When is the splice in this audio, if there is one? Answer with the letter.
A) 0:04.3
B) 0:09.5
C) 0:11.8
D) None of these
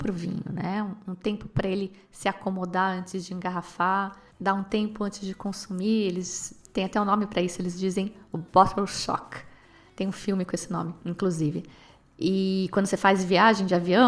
A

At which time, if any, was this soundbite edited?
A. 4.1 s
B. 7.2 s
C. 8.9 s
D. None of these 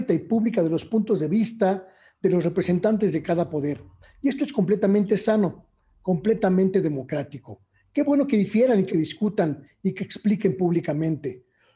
C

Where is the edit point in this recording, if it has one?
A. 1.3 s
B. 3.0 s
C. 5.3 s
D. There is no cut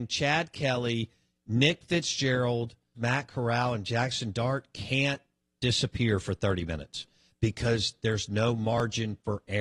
B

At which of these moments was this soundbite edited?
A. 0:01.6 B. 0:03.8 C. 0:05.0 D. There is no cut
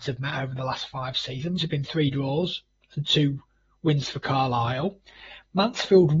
A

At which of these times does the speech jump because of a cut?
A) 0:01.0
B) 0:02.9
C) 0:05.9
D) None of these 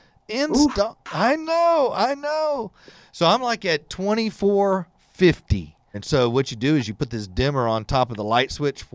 C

